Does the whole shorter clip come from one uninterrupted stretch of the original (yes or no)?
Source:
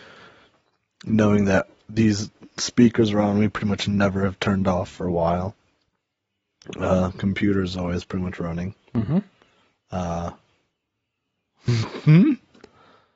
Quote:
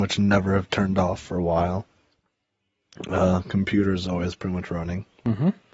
yes